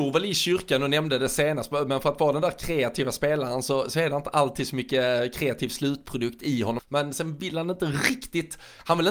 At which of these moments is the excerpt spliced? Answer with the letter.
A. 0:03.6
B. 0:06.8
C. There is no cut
B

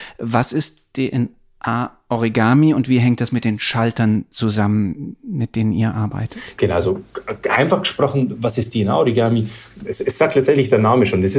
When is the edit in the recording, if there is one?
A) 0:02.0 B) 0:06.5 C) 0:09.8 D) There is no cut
D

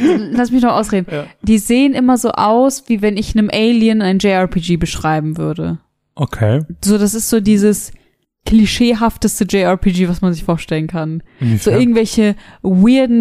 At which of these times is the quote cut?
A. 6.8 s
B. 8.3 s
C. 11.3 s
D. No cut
D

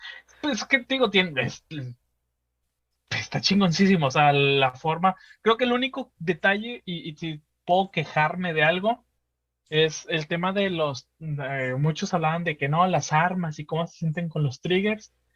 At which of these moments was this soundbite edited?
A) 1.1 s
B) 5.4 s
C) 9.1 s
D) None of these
D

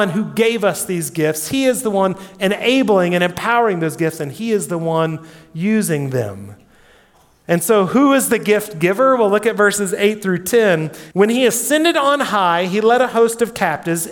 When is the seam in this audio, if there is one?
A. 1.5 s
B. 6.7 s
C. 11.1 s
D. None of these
C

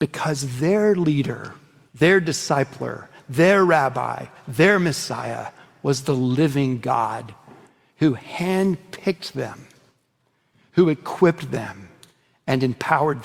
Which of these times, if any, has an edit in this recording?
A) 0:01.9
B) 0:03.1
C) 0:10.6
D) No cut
A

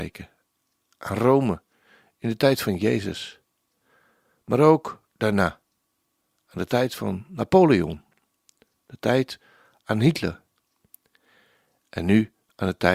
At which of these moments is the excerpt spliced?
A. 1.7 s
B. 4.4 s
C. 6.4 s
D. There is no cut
D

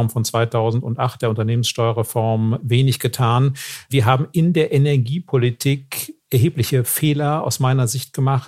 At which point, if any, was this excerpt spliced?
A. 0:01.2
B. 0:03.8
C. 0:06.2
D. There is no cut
C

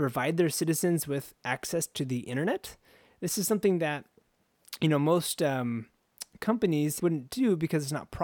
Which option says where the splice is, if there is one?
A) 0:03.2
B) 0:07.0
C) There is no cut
B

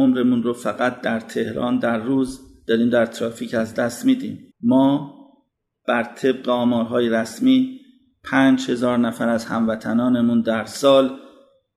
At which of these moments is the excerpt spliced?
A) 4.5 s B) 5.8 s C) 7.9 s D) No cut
A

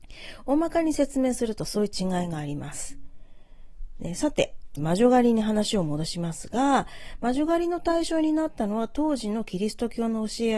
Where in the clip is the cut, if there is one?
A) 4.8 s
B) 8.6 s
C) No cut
A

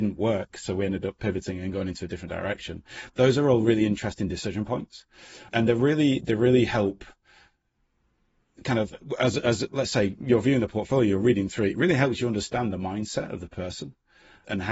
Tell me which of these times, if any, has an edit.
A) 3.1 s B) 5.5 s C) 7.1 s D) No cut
D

